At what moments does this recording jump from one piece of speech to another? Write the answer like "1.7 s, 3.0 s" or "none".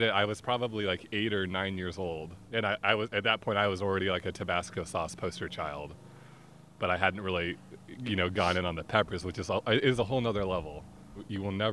none